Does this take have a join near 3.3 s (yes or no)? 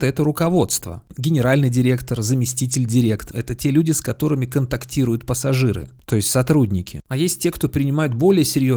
yes